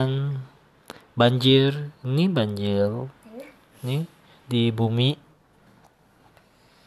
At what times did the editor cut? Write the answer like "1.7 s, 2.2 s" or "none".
none